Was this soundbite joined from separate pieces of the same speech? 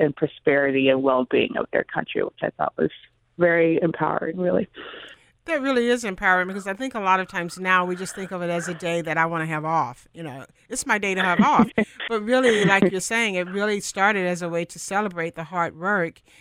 no; 0 cuts

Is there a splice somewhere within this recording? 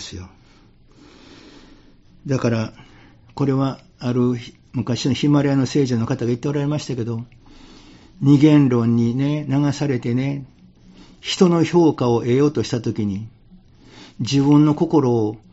no; 0 cuts

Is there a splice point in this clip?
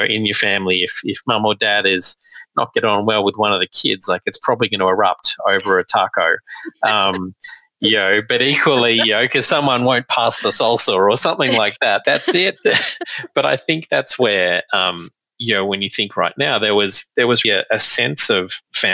yes; 2 cuts; at 12.0 s, 17.4 s

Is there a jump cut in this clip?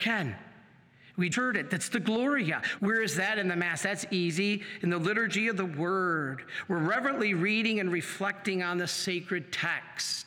yes; 2 cuts; at 1.3 s, 2.8 s

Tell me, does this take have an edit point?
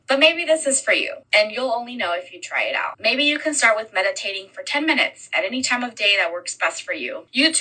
no; 0 cuts

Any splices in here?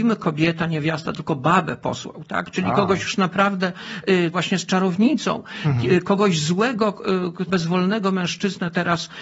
yes; 2 cuts; at 4.3 s, 7.5 s

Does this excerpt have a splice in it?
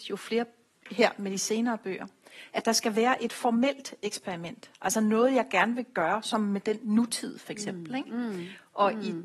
no; 0 cuts

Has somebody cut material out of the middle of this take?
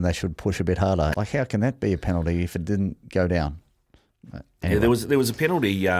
yes; 1 cut; at 1.1 s

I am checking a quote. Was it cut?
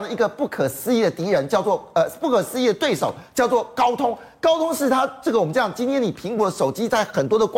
no; 0 cuts

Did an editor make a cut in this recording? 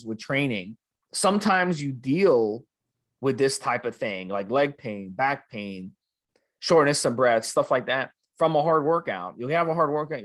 no; 0 cuts

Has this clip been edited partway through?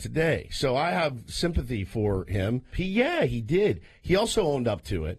yes; 1 cut; at 2.7 s

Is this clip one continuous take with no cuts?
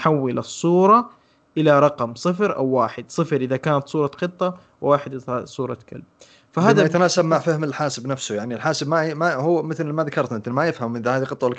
yes; 0 cuts

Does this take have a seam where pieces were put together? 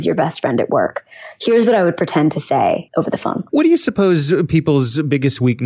no; 0 cuts

